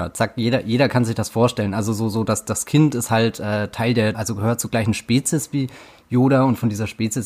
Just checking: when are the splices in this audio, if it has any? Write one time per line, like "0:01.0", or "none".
0:04.1